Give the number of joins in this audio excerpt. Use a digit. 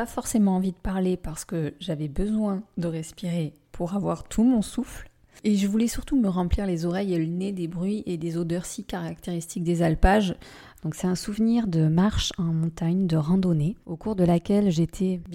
1